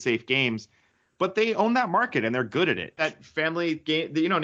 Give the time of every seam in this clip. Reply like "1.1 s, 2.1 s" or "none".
3.0 s